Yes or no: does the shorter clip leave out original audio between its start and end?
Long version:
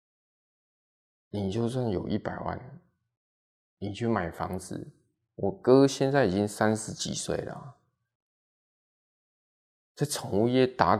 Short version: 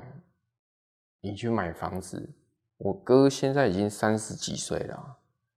no